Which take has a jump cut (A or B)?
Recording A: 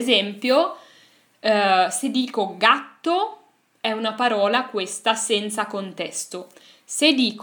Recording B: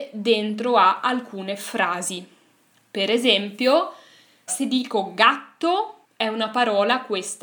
B